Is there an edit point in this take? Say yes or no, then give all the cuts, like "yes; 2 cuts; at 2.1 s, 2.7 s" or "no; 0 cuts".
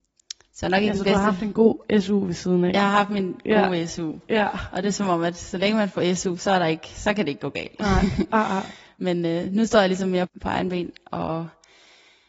yes; 1 cut; at 10.3 s